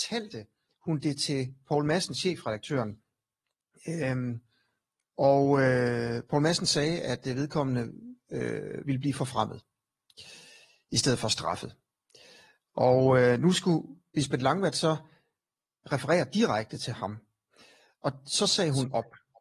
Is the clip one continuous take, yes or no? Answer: yes